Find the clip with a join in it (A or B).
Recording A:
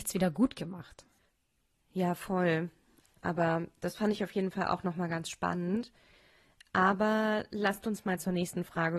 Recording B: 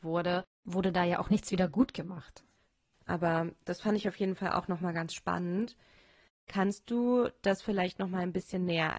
B